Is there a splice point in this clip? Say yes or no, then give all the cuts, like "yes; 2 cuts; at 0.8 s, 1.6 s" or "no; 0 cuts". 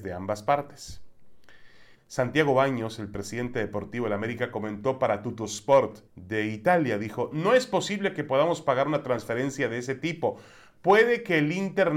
yes; 3 cuts; at 1.9 s, 6.1 s, 7.3 s